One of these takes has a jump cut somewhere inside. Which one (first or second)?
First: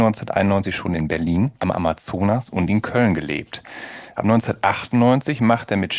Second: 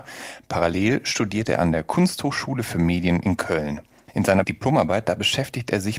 first